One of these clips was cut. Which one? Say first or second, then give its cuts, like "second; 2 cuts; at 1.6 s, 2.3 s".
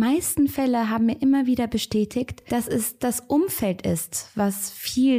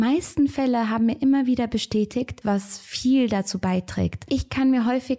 second; 1 cut; at 2.4 s